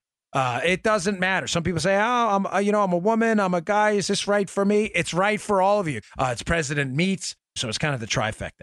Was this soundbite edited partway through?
yes; 2 cuts; at 6.0 s, 7.6 s

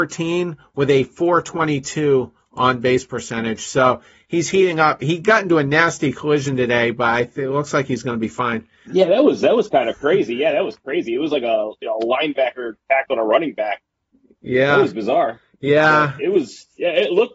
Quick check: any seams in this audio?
yes; 1 cut; at 8.9 s

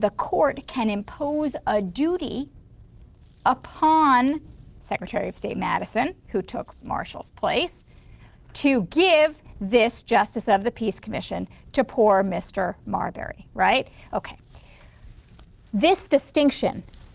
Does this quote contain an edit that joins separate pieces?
no; 0 cuts

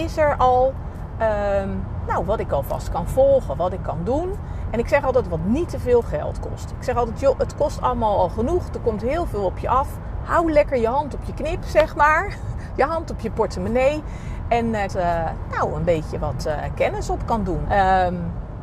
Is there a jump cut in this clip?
yes; 2 cuts; at 14.9 s, 17.7 s

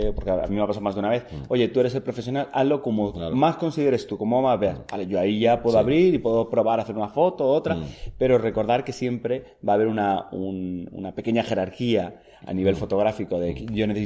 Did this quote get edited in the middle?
no; 0 cuts

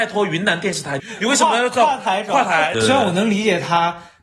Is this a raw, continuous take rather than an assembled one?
no; 2 cuts; at 1.0 s, 2.7 s

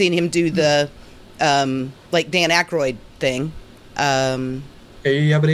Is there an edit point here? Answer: yes; 1 cut; at 3.9 s

